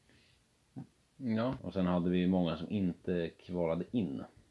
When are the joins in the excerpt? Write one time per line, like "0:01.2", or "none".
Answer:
0:01.6